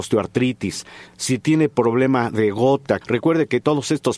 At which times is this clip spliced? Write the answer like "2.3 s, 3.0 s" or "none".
1.1 s, 3.0 s